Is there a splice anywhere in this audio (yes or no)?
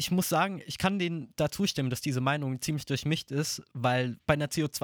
no